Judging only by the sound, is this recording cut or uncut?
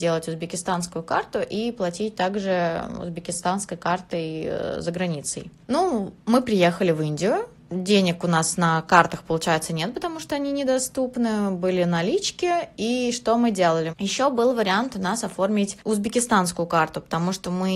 cut